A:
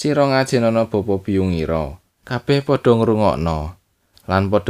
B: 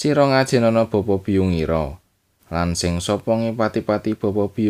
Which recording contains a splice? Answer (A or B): A